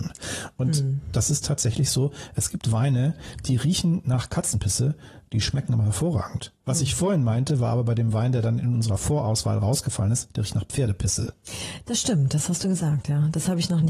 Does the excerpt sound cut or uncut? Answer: uncut